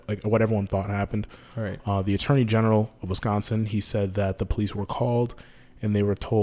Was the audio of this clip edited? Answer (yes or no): no